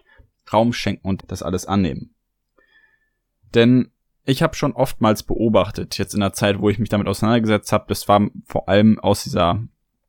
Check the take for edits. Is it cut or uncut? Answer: cut